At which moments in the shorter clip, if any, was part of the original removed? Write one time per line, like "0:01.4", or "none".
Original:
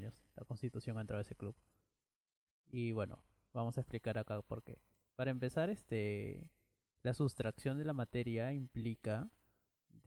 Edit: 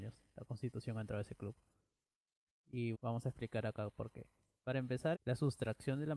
0:02.9
0:05.1